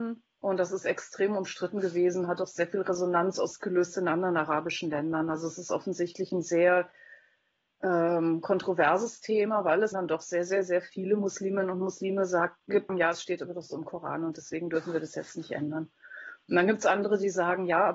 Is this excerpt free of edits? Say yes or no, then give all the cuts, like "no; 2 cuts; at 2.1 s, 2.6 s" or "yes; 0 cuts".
no; 2 cuts; at 9.9 s, 12.9 s